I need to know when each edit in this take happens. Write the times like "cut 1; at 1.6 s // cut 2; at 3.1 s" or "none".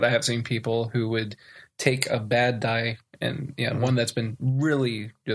none